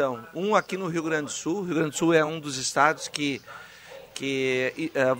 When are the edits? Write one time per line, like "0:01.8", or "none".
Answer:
none